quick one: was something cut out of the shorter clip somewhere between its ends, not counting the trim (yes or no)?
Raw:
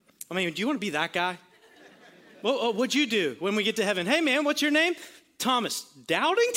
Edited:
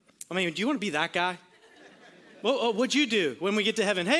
no